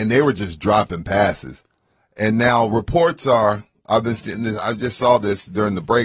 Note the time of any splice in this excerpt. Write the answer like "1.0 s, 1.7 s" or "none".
none